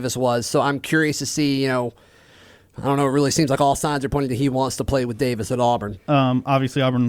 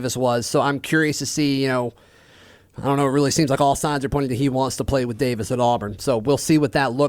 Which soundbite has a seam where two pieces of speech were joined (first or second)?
first